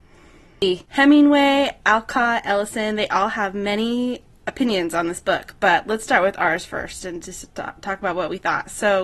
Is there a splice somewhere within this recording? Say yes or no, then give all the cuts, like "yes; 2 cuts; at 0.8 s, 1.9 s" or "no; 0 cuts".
no; 0 cuts